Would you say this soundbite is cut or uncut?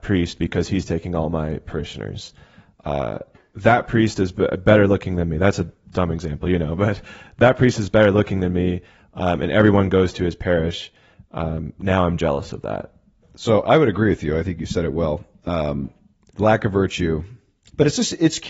cut